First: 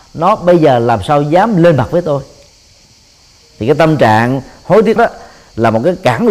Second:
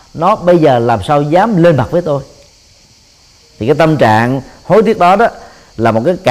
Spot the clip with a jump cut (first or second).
first